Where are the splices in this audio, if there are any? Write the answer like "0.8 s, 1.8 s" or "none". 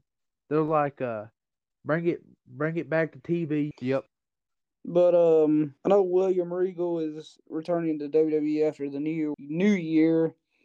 3.7 s, 5.8 s, 9.3 s

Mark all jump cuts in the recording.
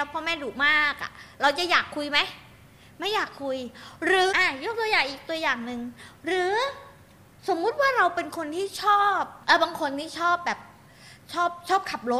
4.3 s, 9.4 s

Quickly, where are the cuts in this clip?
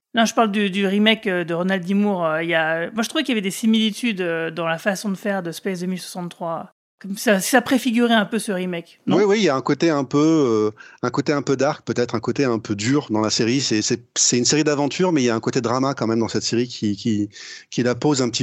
none

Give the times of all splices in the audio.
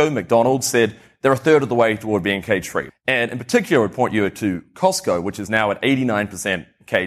2.9 s

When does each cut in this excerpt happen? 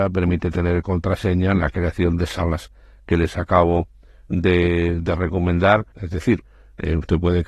5.9 s

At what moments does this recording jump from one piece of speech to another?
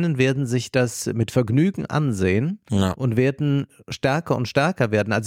none

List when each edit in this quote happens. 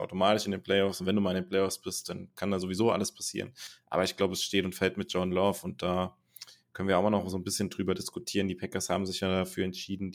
none

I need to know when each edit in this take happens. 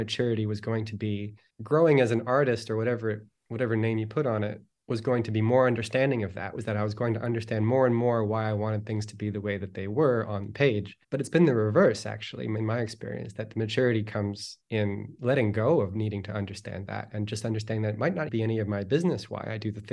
18.3 s

